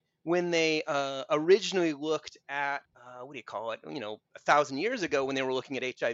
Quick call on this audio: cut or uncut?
cut